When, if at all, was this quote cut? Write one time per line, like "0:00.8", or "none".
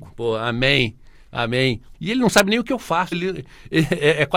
0:01.9
0:03.1